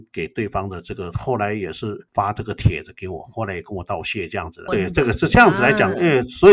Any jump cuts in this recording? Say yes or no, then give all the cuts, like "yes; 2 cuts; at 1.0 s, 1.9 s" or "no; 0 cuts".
yes; 1 cut; at 4.7 s